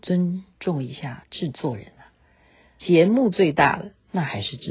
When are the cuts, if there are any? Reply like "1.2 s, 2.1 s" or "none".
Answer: 2.8 s